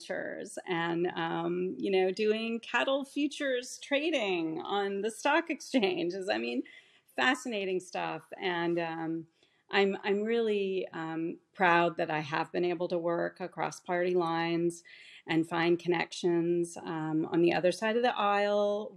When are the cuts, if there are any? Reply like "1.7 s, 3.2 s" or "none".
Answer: none